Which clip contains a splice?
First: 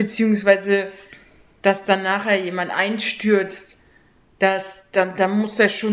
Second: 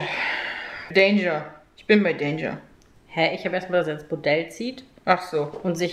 second; 1 cut; at 0.9 s

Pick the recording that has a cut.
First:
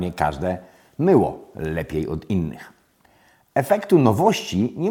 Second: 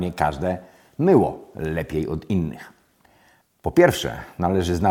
second; 1 cut; at 3.4 s

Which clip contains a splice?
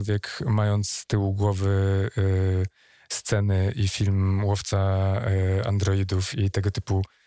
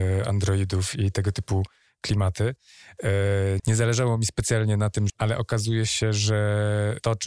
second; 2 cuts; at 3.6 s, 5.1 s

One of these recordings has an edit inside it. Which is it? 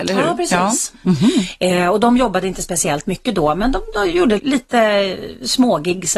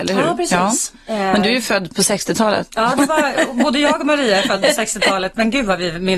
first; 2 cuts; at 1.0 s, 4.4 s

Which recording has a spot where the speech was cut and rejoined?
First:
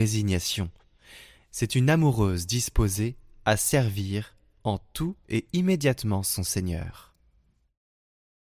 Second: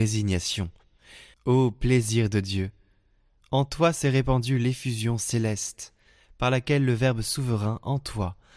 second; 1 cut; at 1.3 s

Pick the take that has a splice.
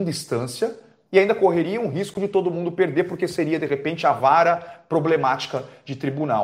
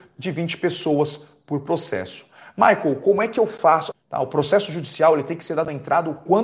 second; 1 cut; at 3.9 s

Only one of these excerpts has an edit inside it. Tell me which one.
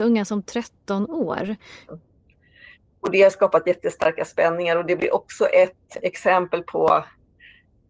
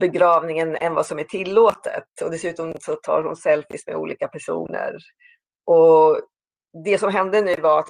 first; 1 cut; at 1.9 s

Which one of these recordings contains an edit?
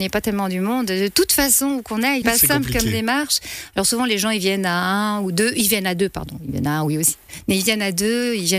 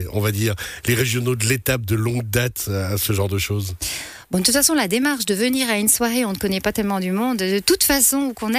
first; 1 cut; at 2.2 s

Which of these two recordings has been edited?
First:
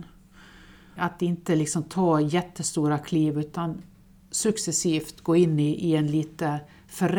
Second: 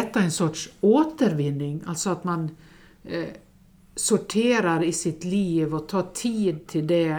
first; 1 cut; at 1.0 s

